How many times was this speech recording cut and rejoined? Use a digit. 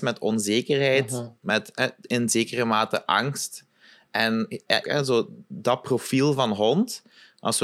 1